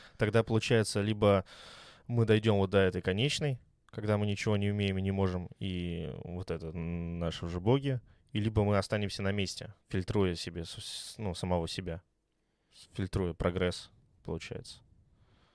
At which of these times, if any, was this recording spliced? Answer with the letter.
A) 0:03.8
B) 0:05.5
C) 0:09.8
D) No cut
C